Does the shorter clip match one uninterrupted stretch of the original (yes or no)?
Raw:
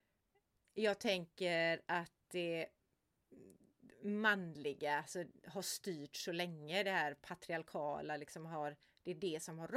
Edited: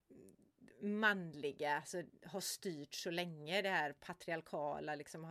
yes